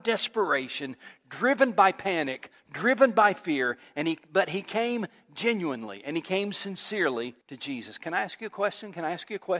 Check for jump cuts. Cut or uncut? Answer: cut